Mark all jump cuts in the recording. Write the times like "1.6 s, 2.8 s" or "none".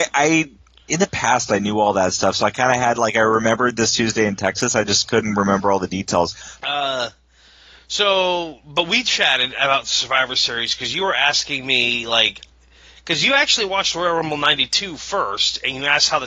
6.6 s